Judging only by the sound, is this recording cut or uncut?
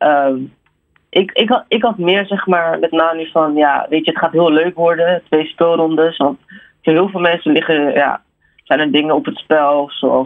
uncut